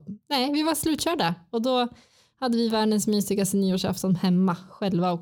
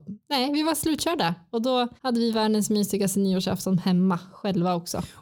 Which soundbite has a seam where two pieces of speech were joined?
second; 1 cut; at 2.0 s

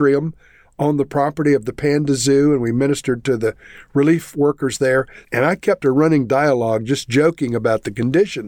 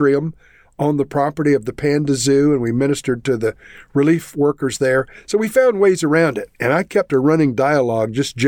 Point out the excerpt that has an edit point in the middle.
first; 1 cut; at 5.2 s

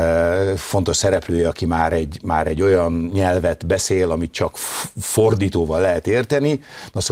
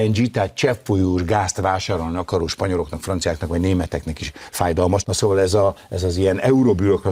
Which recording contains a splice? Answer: second; 1 cut; at 5.0 s

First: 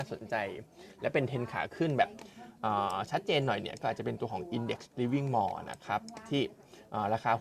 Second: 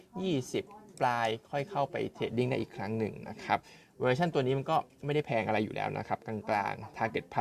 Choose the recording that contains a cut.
second; 1 cut; at 0.9 s

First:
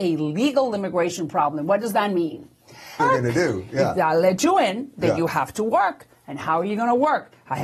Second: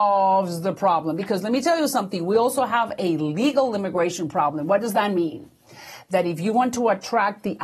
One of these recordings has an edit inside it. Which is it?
first; 1 cut; at 3.0 s

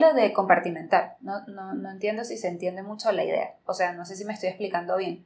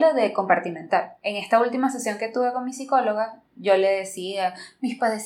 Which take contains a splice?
second; 1 cut; at 1.2 s

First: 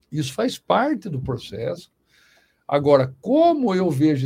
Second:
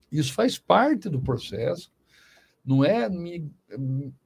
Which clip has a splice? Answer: second; 1 cut; at 2.5 s

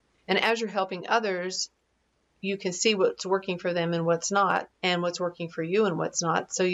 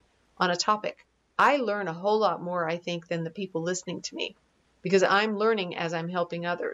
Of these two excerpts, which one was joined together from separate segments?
first; 1 cut; at 4.7 s

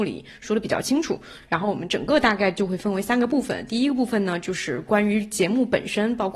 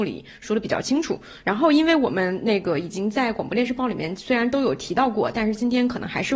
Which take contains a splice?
second; 1 cut; at 1.4 s

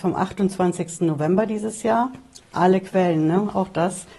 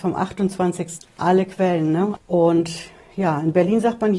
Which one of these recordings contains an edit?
second; 2 cuts; at 1.0 s, 2.2 s

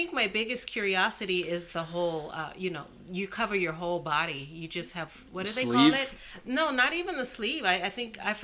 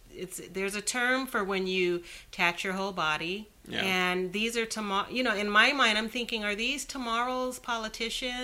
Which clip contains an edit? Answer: second; 1 cut; at 3.6 s

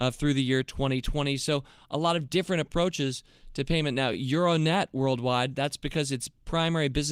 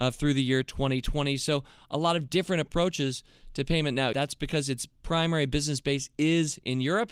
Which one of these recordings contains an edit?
second; 1 cut; at 4.1 s

